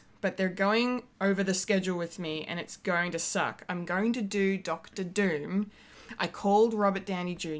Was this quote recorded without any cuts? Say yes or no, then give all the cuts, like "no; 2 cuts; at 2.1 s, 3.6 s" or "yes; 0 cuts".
yes; 0 cuts